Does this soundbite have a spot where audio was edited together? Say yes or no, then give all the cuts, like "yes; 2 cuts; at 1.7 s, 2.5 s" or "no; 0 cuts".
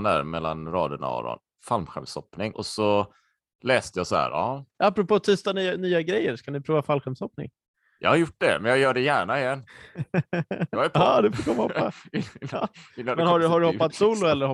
yes; 1 cut; at 2.5 s